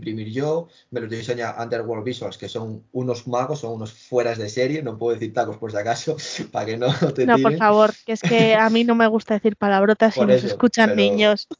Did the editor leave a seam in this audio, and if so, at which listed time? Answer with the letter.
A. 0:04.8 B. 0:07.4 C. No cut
C